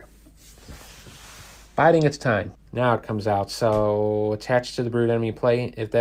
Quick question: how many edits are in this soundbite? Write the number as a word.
one